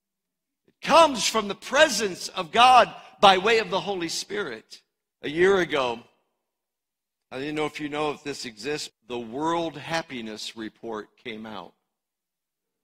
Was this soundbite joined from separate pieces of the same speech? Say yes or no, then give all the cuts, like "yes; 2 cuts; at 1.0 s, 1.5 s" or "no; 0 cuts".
yes; 2 cuts; at 5.1 s, 8.9 s